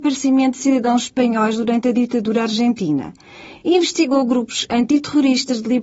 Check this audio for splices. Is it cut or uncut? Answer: uncut